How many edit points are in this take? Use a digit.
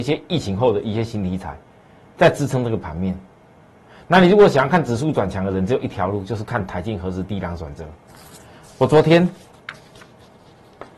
0